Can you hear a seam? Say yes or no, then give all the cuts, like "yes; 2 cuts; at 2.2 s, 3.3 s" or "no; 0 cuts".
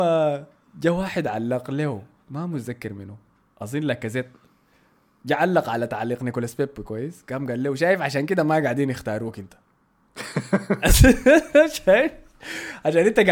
no; 0 cuts